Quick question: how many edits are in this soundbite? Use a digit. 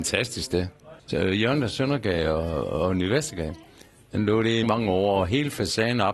2